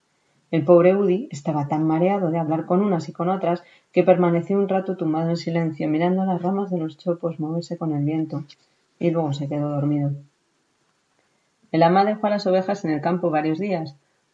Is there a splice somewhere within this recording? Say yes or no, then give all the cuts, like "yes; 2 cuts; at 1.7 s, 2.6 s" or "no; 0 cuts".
no; 0 cuts